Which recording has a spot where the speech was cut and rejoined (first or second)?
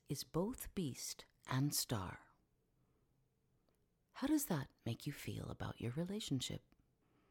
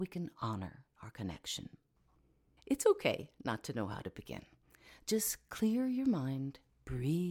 second